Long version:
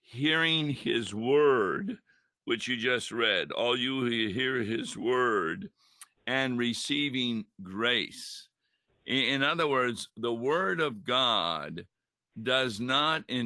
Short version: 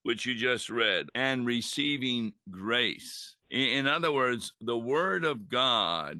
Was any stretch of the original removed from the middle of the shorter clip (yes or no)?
yes